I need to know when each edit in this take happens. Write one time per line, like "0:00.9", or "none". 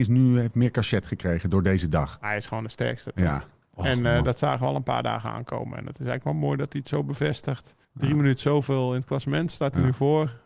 0:07.8